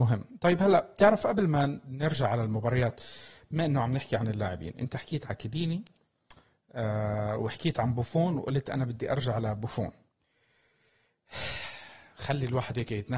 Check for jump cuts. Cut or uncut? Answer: uncut